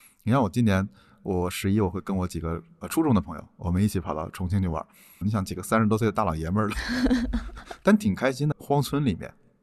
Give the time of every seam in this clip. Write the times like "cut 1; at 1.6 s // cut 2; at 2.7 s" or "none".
cut 1; at 5.2 s // cut 2; at 8.5 s